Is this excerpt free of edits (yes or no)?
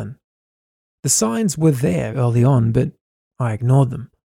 no